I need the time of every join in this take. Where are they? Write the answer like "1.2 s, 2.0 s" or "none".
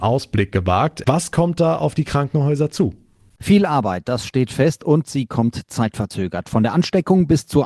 1.0 s